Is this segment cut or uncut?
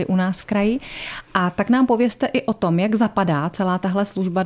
uncut